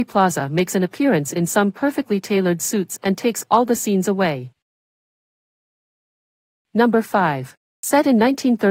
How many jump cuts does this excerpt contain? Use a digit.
1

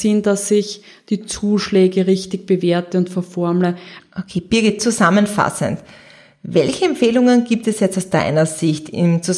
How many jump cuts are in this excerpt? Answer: 1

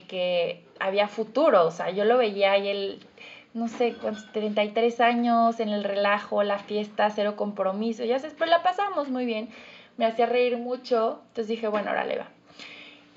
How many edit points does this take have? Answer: 0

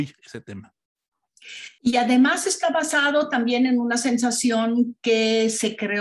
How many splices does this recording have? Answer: 1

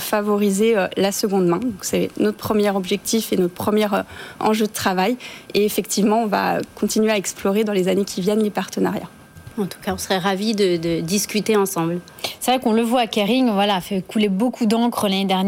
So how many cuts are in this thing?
0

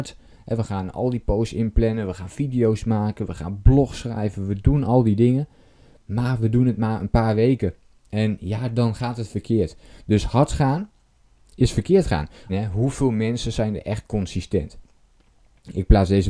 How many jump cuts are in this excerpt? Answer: 2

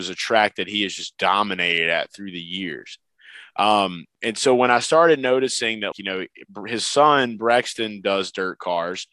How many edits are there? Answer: 1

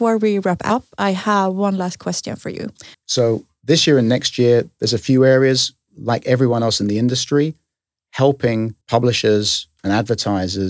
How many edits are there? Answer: 2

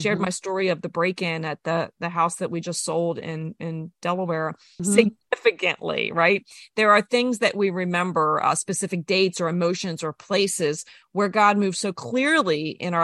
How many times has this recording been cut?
1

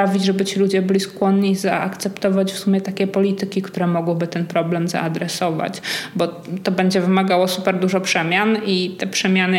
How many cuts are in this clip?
0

